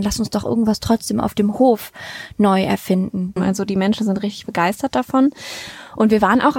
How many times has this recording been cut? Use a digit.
1